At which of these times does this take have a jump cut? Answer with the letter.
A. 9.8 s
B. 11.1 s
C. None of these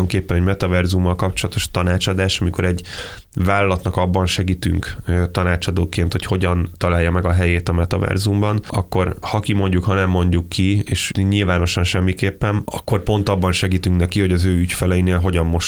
B